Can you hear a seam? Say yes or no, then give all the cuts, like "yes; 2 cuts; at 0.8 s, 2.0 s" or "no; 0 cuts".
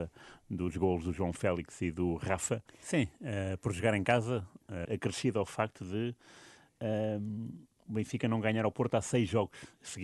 yes; 2 cuts; at 2.7 s, 4.8 s